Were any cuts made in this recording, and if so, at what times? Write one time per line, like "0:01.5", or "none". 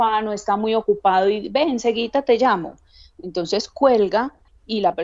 none